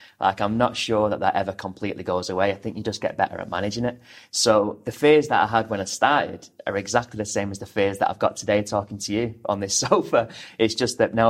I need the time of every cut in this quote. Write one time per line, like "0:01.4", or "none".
none